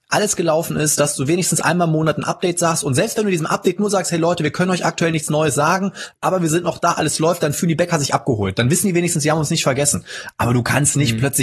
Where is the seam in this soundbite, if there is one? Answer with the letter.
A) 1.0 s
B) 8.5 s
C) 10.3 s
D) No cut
D